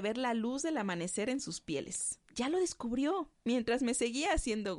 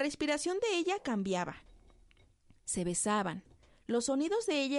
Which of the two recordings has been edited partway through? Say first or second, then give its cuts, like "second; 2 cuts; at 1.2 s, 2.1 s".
first; 2 cuts; at 2.3 s, 3.3 s